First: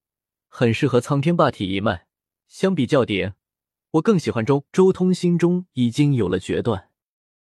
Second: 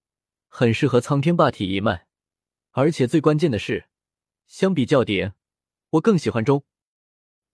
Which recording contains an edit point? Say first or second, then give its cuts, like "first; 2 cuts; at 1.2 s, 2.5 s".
first; 2 cuts; at 2.4 s, 4.7 s